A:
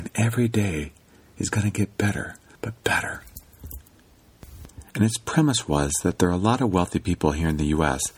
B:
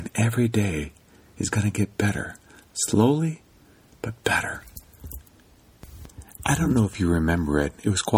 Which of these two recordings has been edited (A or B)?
A